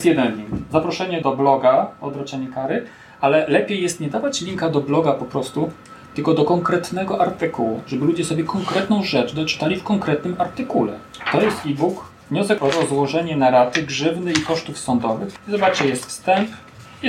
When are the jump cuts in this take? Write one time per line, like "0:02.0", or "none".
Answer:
0:01.2